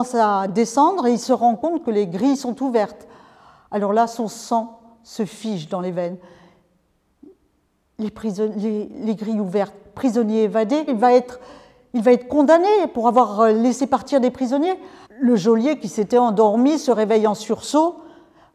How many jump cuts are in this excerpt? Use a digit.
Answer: 2